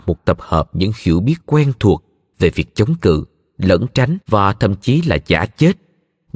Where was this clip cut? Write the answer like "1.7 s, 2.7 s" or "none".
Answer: 4.2 s